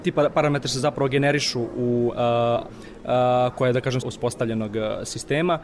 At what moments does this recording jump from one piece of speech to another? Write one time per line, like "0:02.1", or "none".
0:02.7
0:04.0